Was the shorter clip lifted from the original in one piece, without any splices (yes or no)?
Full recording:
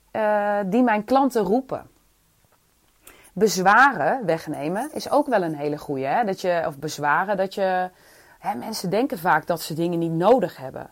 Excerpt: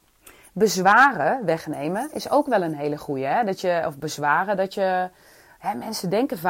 yes